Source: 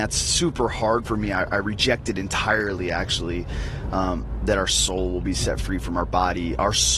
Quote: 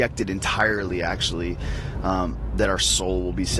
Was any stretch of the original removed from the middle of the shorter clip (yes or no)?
no